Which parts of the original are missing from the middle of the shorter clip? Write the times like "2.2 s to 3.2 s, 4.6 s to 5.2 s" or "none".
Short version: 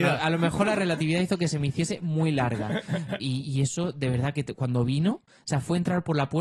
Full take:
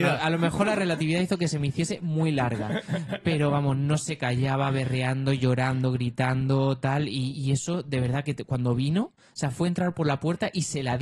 3.2 s to 7.1 s